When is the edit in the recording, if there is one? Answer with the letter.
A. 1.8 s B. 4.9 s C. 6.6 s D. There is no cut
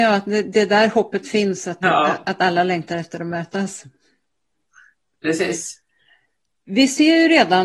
A